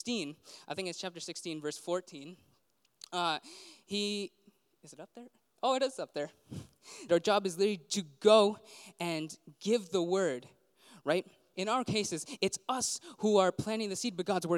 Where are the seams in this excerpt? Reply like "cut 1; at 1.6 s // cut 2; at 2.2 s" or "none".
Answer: cut 1; at 7.1 s // cut 2; at 11.5 s

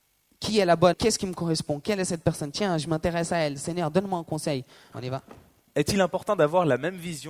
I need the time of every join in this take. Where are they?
cut 1; at 0.9 s // cut 2; at 4.9 s

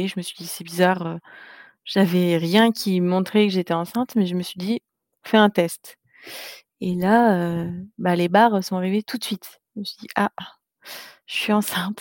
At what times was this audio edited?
none

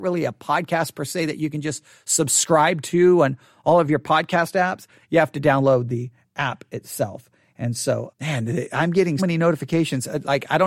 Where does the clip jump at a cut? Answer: cut 1; at 8.1 s // cut 2; at 9.2 s

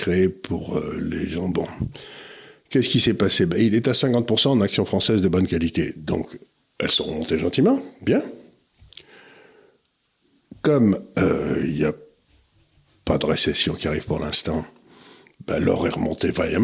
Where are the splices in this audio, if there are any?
none

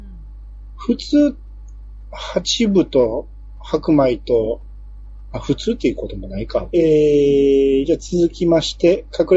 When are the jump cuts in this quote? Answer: cut 1; at 6.7 s

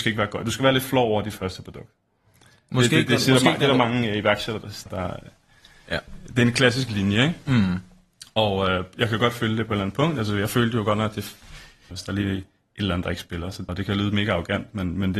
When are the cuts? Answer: cut 1; at 4.9 s // cut 2; at 11.9 s // cut 3; at 13.7 s

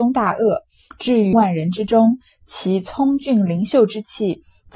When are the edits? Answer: cut 1; at 1.3 s

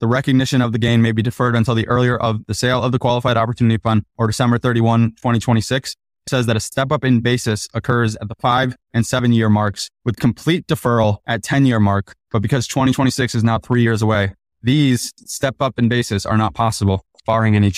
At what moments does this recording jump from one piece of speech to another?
cut 1; at 6.3 s

